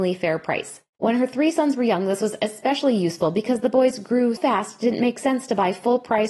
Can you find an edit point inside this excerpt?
yes; 2 cuts; at 0.9 s, 4.4 s

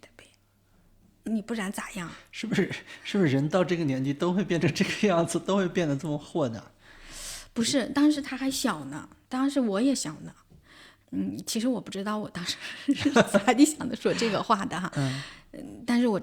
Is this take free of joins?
no; 2 cuts; at 1.3 s, 11.0 s

